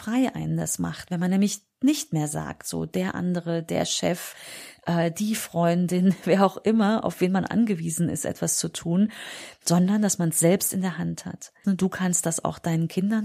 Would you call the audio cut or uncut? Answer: cut